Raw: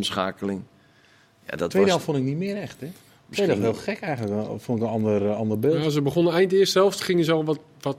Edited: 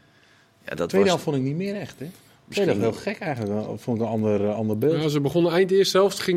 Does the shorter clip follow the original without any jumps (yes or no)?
yes